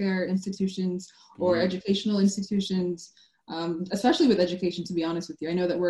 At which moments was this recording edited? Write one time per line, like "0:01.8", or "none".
none